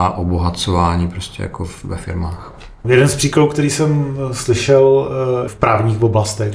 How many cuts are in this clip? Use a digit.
2